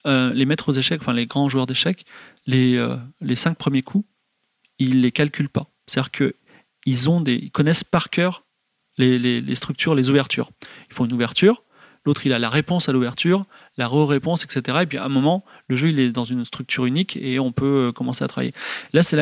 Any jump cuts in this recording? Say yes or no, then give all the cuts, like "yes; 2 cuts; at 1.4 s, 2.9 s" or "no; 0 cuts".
no; 0 cuts